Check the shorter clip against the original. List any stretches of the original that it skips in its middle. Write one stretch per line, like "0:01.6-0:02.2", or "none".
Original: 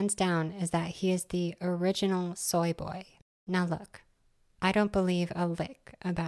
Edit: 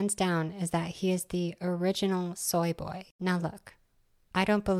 0:03.1-0:03.4

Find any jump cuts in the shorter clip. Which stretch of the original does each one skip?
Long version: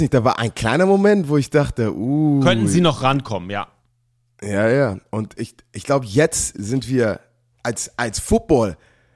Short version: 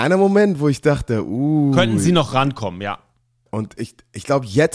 0:04.1-0:05.1

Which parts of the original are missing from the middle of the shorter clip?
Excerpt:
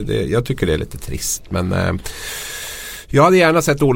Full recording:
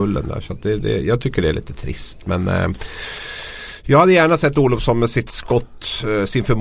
none

